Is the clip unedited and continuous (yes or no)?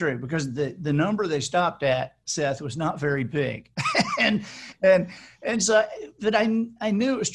yes